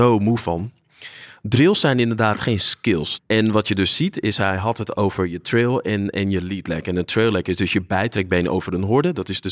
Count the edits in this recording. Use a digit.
1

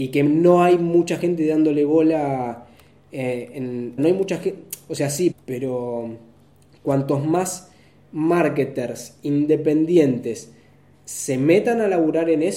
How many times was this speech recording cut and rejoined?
2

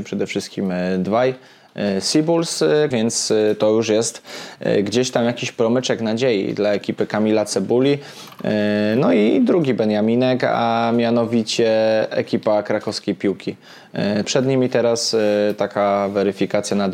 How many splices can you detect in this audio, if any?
2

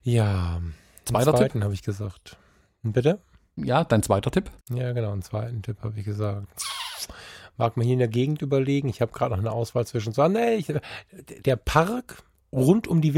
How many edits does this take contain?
2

